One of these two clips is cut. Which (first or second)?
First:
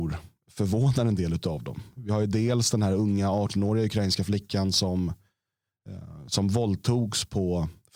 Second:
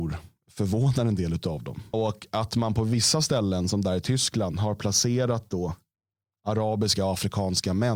second